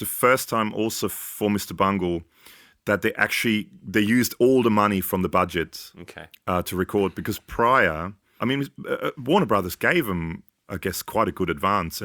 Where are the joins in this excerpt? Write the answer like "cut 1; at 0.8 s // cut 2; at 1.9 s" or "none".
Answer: cut 1; at 8.4 s